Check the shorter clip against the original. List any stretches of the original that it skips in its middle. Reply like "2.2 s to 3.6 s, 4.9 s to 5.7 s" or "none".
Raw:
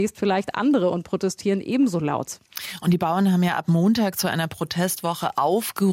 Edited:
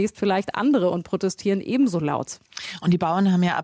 none